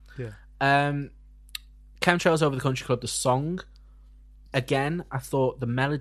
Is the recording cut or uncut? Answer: uncut